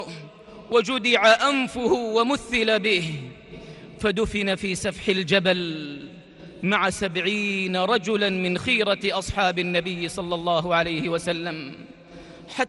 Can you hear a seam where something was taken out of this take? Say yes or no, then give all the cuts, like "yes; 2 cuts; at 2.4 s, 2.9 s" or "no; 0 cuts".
no; 0 cuts